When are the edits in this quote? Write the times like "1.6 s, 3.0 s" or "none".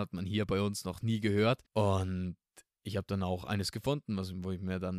1.7 s

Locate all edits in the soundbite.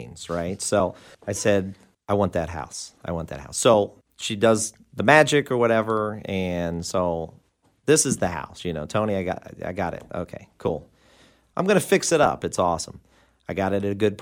none

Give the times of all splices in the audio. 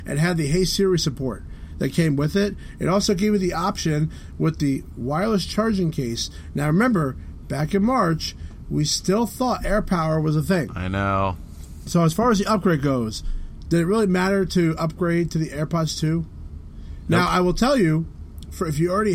11.8 s

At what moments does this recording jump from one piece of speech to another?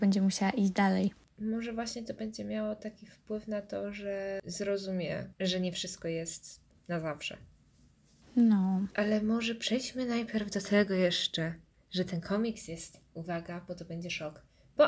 1.2 s

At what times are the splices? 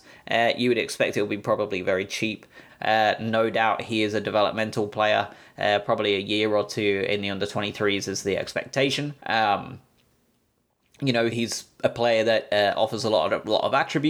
2.7 s, 9.2 s, 11.3 s

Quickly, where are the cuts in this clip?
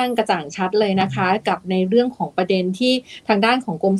none

